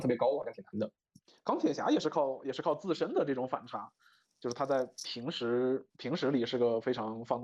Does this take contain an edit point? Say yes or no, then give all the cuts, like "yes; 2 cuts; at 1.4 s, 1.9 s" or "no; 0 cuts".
no; 0 cuts